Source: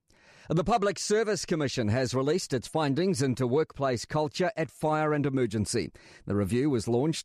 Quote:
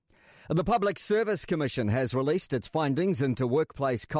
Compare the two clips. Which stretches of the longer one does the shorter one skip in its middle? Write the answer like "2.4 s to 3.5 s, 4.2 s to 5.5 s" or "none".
none